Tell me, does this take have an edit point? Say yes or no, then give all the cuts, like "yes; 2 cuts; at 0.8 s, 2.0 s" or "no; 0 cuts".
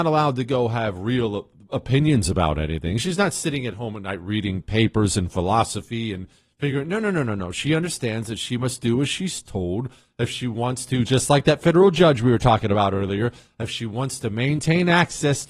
no; 0 cuts